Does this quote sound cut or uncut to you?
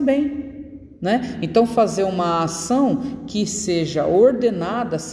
uncut